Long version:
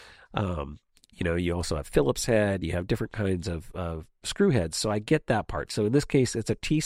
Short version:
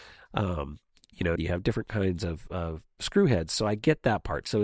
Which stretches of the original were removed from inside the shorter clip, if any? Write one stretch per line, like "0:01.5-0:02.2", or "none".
0:01.4-0:02.6